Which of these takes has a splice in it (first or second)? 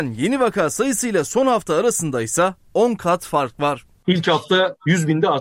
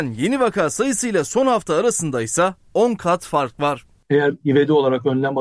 first